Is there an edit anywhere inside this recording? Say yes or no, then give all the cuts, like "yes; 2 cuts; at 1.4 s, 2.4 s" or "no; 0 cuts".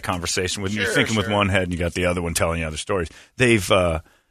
no; 0 cuts